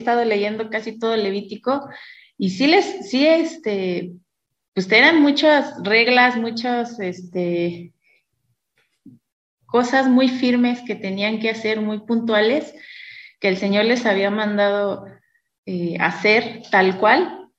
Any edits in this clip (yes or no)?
no